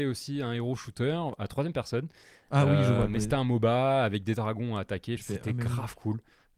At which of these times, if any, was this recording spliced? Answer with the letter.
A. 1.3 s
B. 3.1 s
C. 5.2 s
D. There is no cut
C